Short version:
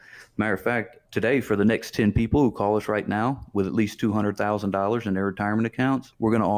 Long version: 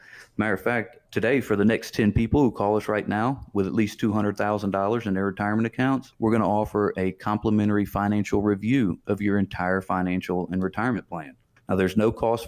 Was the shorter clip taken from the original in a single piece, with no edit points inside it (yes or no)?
yes